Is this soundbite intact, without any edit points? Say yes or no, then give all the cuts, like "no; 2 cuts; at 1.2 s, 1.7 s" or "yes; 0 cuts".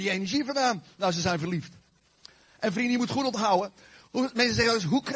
yes; 0 cuts